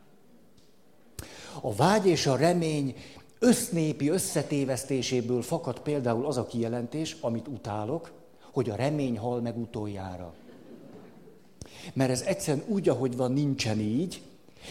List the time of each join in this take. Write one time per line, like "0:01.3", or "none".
0:01.6